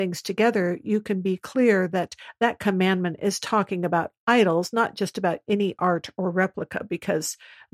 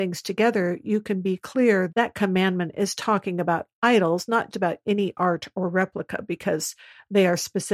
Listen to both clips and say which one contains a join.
second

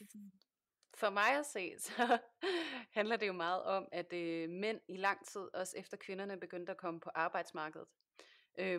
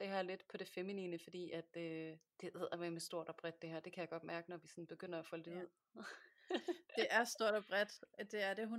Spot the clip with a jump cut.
second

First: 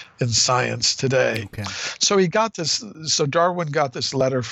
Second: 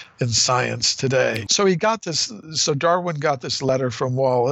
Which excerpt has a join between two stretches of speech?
second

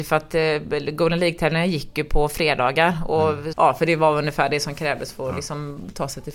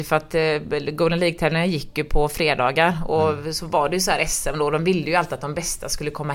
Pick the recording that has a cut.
first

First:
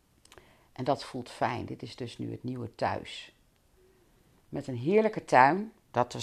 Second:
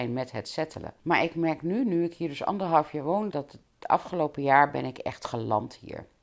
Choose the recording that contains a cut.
second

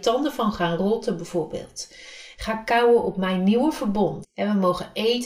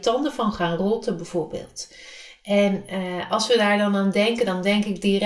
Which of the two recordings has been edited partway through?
first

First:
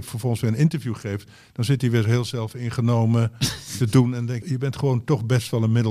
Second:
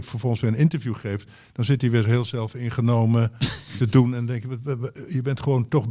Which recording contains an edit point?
first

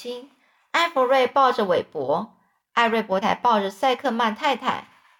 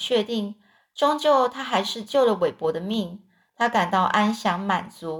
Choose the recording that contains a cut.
first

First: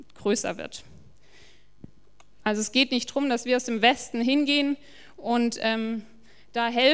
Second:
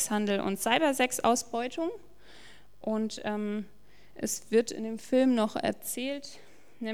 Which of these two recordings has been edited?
first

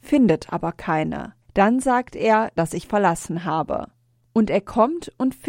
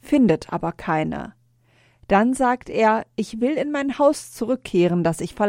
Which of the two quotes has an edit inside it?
first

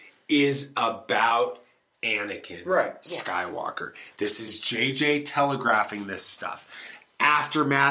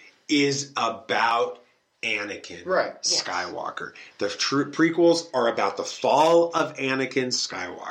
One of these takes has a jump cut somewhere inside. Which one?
first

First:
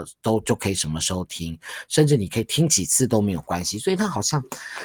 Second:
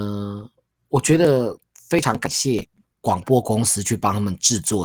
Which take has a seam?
second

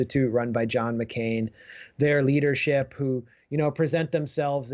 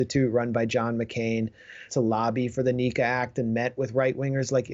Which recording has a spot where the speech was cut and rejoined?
second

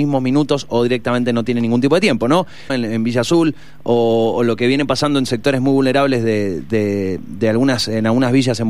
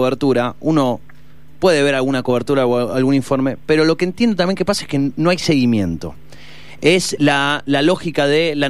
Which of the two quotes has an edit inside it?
first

